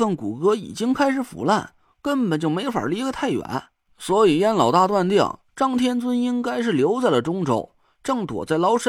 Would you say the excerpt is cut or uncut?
uncut